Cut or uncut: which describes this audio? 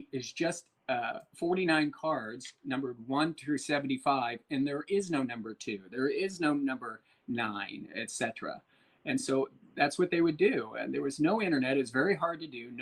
uncut